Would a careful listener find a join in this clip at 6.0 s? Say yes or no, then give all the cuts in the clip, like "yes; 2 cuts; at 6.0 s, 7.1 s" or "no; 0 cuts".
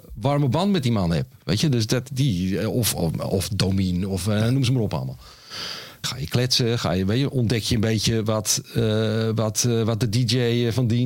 yes; 1 cut; at 6.0 s